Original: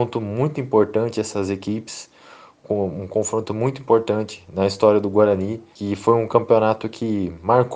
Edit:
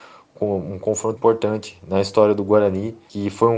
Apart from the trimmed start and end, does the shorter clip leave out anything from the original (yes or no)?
yes